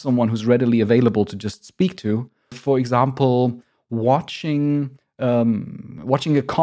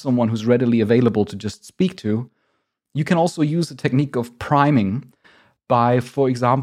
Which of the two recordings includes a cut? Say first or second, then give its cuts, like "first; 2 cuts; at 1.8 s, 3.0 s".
first; 1 cut; at 2.5 s